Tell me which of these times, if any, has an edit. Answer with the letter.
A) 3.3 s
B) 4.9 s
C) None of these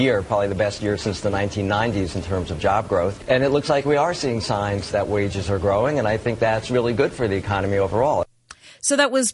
B